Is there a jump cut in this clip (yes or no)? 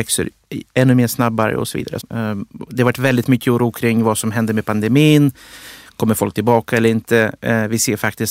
yes